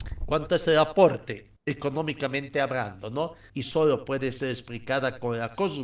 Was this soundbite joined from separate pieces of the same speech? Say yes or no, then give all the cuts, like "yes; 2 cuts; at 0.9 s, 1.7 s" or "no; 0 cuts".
yes; 2 cuts; at 1.6 s, 3.5 s